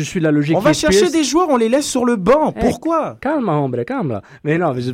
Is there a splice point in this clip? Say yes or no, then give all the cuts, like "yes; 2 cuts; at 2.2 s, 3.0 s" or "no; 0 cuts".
no; 0 cuts